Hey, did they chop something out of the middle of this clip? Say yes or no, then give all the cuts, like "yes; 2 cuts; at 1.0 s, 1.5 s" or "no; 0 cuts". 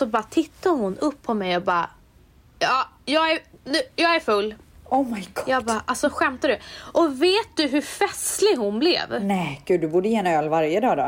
no; 0 cuts